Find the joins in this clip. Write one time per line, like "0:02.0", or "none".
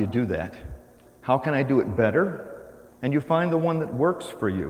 0:01.0
0:02.9